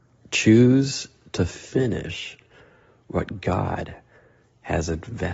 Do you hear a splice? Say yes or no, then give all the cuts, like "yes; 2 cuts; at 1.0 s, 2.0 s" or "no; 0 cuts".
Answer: no; 0 cuts